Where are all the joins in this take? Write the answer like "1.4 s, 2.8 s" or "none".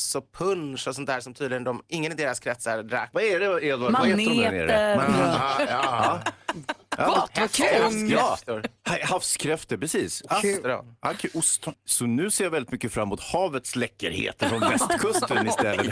3.1 s, 11.7 s